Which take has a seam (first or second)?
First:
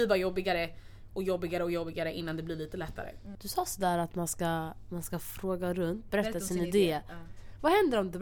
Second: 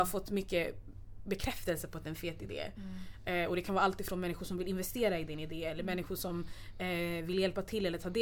first